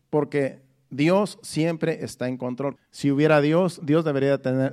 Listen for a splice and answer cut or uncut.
cut